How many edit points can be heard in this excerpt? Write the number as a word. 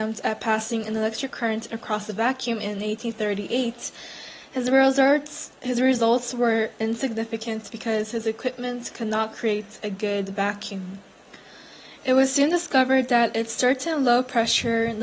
one